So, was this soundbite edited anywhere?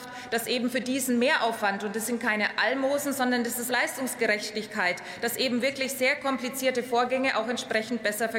yes; 1 cut; at 3.7 s

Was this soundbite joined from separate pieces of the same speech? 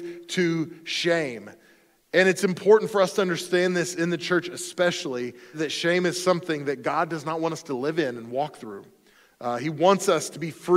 yes; 1 cut; at 5.5 s

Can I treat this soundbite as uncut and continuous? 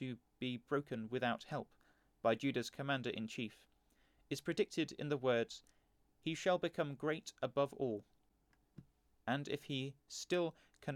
no; 1 cut; at 9.2 s

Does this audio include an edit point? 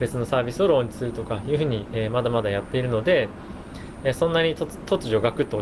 no; 0 cuts

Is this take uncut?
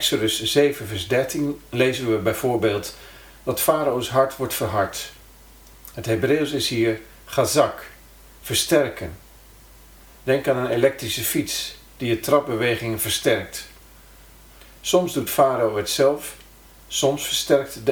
no; 1 cut; at 10.1 s

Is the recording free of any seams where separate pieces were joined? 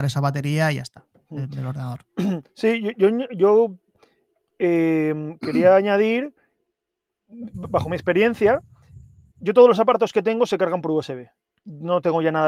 yes; 0 cuts

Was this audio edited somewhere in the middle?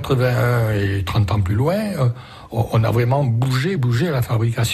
yes; 1 cut; at 3.8 s

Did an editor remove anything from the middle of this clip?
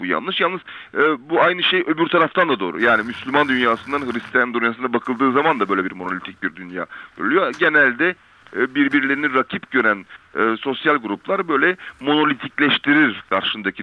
no; 0 cuts

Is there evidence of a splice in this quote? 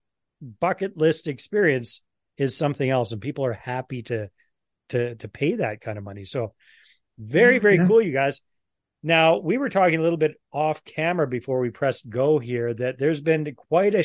no; 0 cuts

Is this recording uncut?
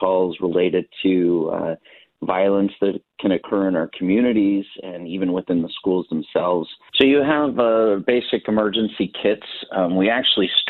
no; 1 cut; at 6.9 s

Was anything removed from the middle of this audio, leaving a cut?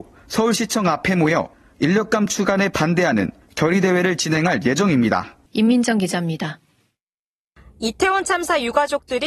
yes; 1 cut; at 5.5 s

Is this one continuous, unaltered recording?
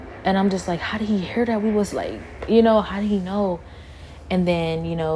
yes; 0 cuts

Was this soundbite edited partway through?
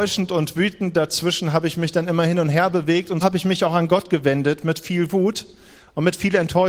yes; 1 cut; at 3.2 s

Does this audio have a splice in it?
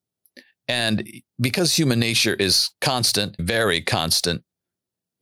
yes; 1 cut; at 3.4 s

